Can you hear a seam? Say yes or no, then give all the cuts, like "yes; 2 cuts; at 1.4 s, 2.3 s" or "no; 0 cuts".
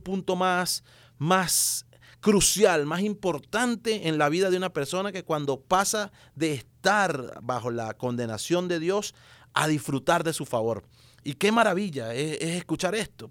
no; 0 cuts